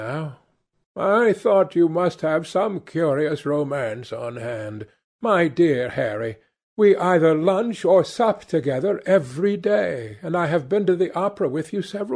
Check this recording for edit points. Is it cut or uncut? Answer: cut